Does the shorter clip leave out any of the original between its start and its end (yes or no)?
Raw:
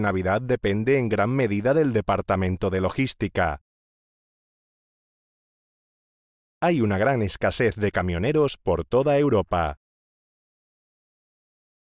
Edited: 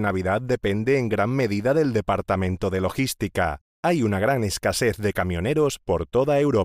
yes